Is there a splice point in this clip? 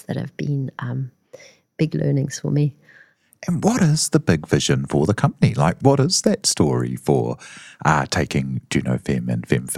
no; 0 cuts

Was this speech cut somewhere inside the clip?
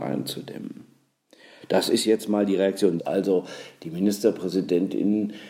yes; 1 cut; at 3.0 s

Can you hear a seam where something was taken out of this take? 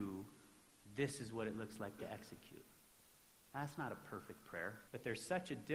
yes; 1 cut; at 4.8 s

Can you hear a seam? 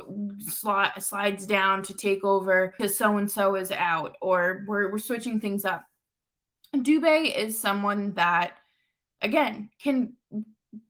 no; 0 cuts

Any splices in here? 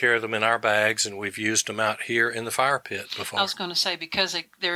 no; 0 cuts

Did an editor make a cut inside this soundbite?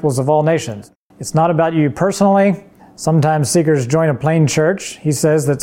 yes; 2 cuts; at 1.1 s, 2.8 s

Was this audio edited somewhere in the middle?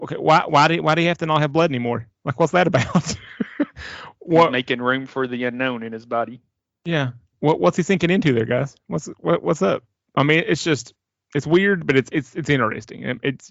no; 0 cuts

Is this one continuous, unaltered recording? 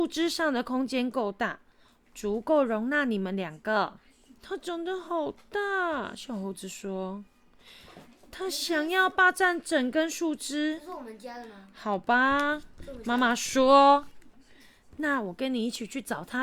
no; 1 cut; at 4.4 s

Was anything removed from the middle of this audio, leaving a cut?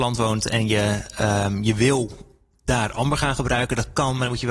no; 0 cuts

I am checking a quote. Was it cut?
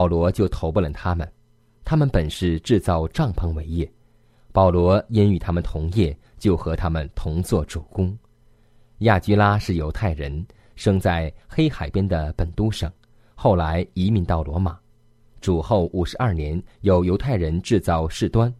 no; 0 cuts

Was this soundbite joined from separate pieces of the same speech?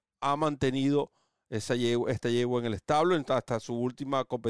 no; 0 cuts

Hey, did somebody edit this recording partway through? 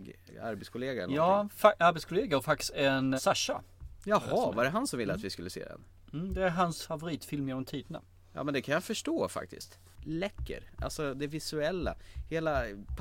yes; 1 cut; at 3.2 s

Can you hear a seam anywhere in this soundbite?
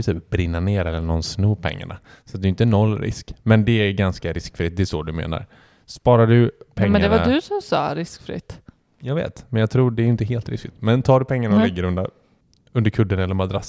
no; 0 cuts

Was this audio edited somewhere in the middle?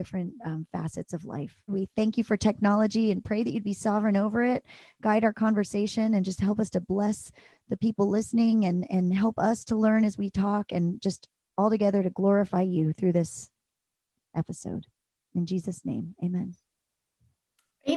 yes; 1 cut; at 1.7 s

